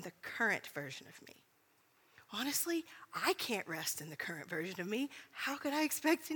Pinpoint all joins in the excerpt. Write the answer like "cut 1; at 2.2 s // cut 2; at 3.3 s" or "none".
none

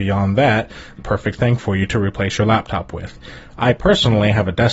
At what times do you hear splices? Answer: cut 1; at 1.0 s

